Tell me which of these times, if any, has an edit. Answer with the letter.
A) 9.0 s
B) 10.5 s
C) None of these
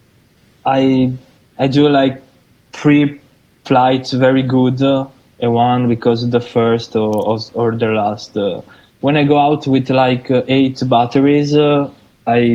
C